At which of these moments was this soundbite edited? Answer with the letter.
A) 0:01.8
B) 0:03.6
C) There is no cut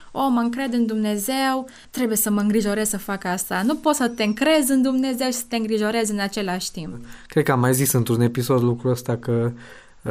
A